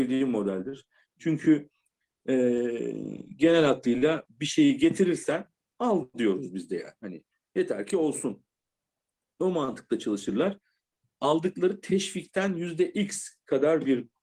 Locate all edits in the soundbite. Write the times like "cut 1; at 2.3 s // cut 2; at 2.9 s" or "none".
none